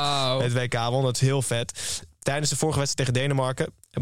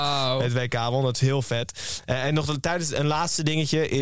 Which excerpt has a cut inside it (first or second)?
first